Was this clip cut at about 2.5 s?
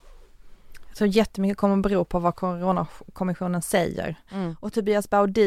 no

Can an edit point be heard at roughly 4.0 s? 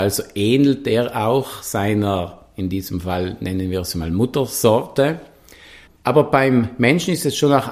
no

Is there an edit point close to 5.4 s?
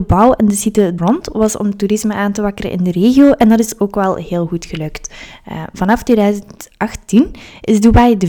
no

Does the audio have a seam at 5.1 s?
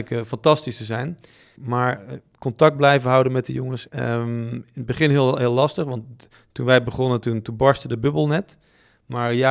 no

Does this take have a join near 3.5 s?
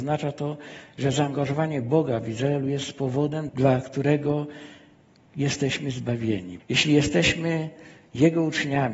yes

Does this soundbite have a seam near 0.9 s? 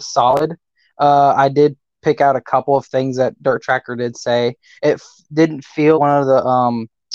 no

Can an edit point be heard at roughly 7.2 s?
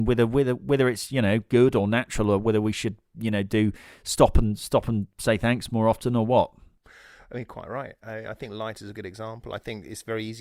no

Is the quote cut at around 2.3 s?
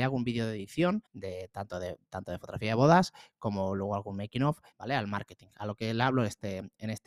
no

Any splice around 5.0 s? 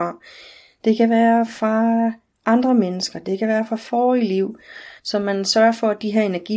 yes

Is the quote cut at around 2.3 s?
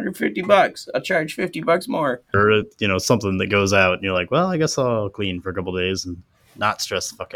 yes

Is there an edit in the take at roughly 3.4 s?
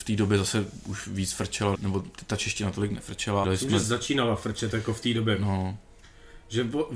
yes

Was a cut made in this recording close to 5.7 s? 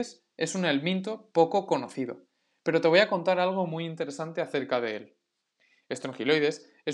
no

